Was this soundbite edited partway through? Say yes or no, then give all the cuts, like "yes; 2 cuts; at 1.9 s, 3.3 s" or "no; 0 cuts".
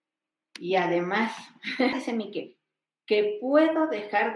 yes; 1 cut; at 1.9 s